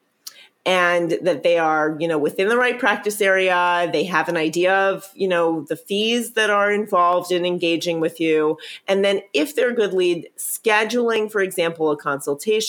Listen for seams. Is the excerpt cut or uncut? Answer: uncut